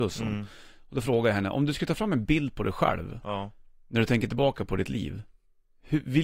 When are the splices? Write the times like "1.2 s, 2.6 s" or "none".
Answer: none